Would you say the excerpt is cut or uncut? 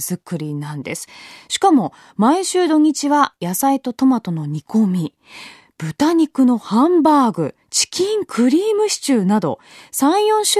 cut